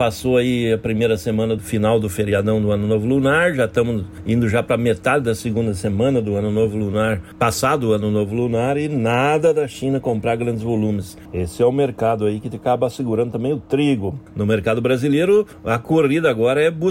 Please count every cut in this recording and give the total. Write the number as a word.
zero